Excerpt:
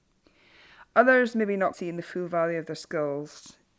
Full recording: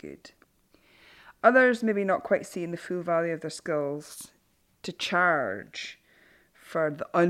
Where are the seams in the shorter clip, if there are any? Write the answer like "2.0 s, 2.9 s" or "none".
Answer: 1.7 s